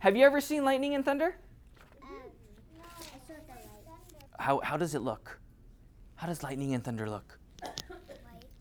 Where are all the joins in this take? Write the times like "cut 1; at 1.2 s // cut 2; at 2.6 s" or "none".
cut 1; at 4.3 s